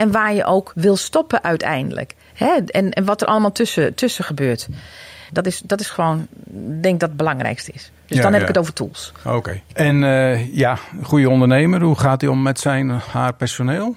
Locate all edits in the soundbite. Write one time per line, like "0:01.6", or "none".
0:05.3